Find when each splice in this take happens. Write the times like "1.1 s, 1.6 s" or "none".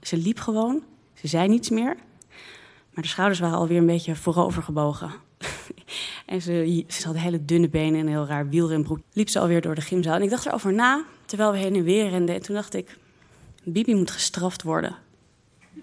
7.0 s, 9.0 s, 13.6 s